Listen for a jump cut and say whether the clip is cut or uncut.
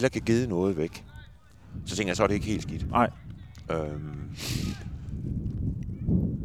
uncut